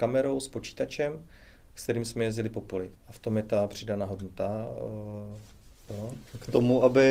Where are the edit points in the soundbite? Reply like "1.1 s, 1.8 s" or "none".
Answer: 2.9 s, 5.9 s